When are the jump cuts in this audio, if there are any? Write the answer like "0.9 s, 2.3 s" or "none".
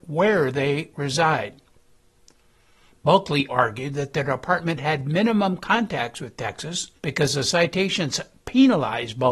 3.5 s, 7.0 s